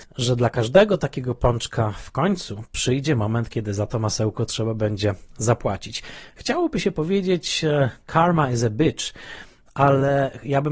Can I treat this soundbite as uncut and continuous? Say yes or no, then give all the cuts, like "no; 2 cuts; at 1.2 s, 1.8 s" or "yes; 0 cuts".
yes; 0 cuts